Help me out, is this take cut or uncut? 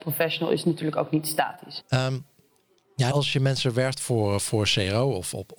cut